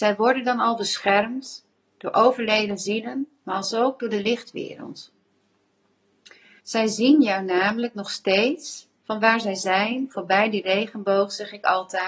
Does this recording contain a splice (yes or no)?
yes